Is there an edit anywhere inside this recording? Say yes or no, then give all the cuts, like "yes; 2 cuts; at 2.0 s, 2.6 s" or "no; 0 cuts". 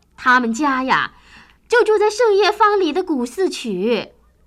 no; 0 cuts